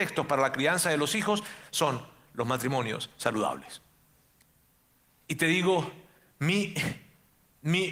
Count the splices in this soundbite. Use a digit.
1